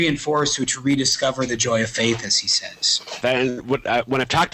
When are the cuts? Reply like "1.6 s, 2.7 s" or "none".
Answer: 3.2 s